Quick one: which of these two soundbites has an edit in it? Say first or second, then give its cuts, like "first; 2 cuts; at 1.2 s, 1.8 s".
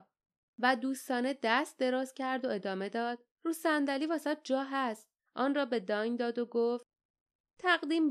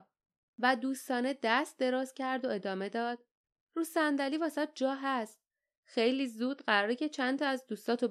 first; 2 cuts; at 3.3 s, 5.3 s